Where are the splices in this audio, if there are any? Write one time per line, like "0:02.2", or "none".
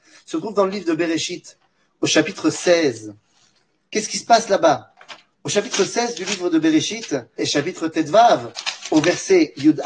0:07.4